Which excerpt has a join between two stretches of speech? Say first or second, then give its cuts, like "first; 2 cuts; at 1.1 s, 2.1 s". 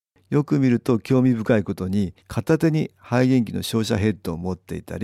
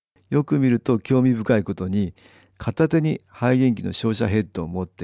first; 1 cut; at 2.2 s